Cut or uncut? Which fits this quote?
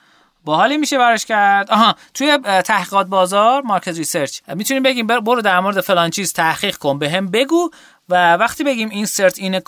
cut